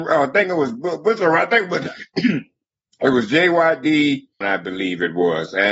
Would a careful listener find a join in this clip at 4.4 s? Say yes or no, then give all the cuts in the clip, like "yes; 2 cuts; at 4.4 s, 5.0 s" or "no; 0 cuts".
yes; 1 cut; at 4.4 s